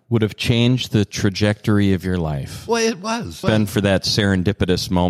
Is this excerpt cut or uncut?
cut